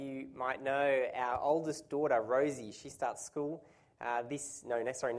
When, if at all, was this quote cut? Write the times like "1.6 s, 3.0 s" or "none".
none